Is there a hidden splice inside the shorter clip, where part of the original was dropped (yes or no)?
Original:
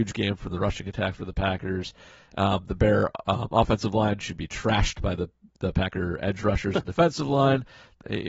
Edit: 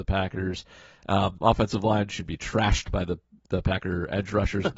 yes